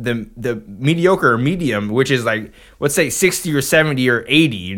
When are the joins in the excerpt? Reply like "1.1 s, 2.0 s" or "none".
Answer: none